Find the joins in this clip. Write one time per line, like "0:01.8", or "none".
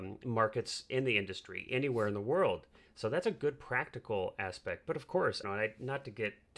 0:02.8
0:05.4